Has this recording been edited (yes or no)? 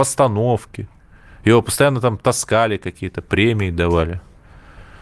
no